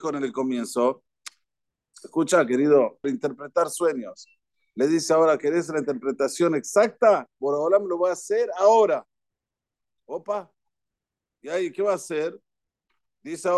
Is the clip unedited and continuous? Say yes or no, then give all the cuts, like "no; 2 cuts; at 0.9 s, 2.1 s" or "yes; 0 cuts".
no; 1 cut; at 3.0 s